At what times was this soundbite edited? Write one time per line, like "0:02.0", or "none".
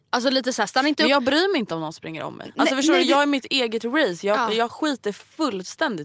none